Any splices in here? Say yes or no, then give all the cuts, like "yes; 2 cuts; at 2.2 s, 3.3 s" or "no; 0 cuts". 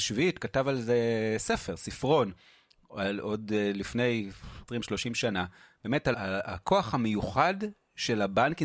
yes; 2 cuts; at 4.7 s, 6.1 s